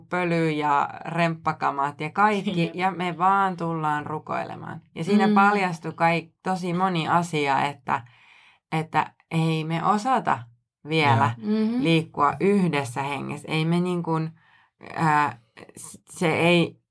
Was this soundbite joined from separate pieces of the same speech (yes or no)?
no